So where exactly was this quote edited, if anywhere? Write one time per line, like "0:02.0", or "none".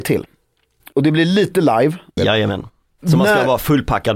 0:02.2